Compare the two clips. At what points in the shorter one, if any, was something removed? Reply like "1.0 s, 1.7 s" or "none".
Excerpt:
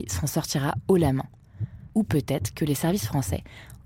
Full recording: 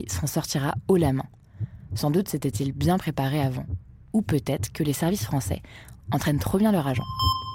1.9 s